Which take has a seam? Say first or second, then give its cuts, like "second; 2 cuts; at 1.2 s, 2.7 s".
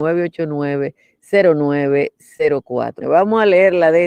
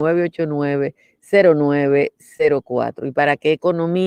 first; 1 cut; at 3.0 s